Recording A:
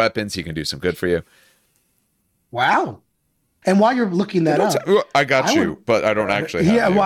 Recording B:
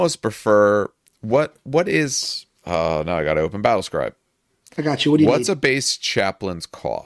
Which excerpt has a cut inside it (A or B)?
A